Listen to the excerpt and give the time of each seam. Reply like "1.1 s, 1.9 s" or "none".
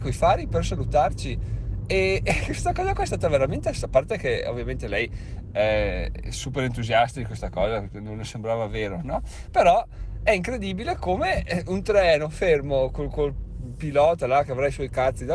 none